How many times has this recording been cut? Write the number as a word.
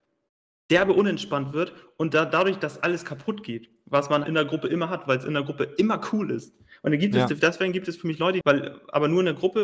two